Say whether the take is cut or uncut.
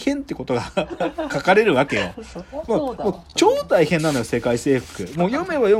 uncut